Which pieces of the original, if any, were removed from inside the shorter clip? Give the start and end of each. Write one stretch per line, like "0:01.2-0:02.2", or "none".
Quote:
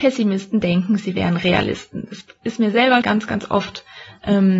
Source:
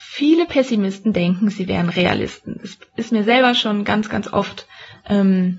0:03.5-0:03.8